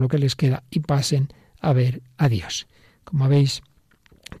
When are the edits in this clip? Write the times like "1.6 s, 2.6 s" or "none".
2.9 s